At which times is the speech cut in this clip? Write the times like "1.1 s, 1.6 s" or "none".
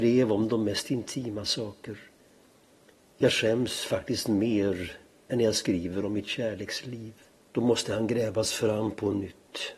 7.4 s

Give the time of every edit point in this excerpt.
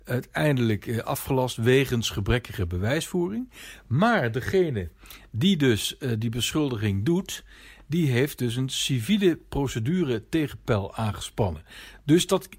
none

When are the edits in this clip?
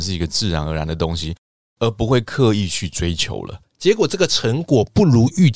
3.6 s

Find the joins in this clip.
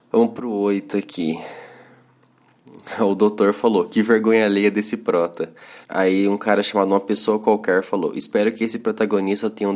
5.8 s

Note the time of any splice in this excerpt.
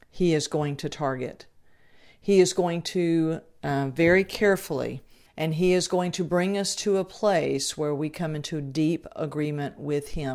5.3 s

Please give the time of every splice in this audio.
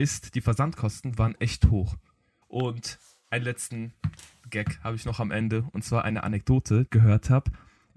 2.4 s, 6.9 s

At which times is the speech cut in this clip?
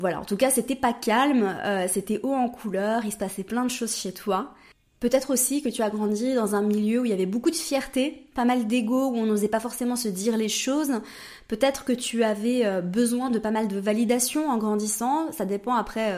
none

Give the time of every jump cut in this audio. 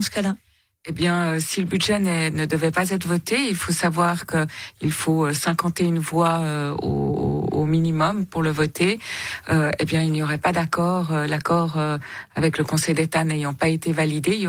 none

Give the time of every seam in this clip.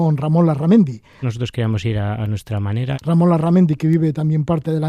1.2 s, 2.9 s

